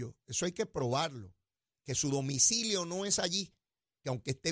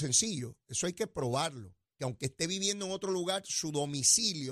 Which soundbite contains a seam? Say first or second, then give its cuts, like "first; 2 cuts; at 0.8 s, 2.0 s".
second; 1 cut; at 1.9 s